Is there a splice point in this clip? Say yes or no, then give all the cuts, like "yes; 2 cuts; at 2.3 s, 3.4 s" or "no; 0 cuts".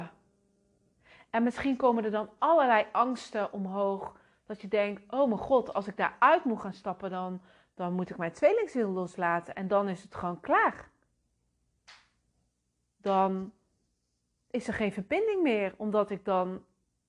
no; 0 cuts